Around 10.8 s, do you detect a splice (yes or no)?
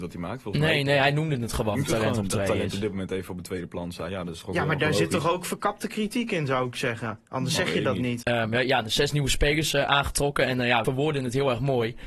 yes